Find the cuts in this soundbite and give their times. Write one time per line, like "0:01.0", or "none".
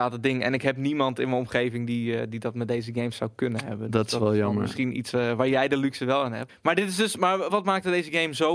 0:06.5
0:07.5